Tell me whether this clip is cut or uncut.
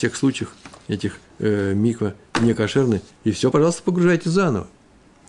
uncut